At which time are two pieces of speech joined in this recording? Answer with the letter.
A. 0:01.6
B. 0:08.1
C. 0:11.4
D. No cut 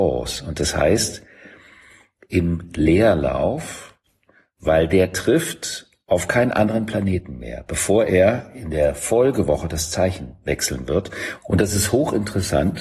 C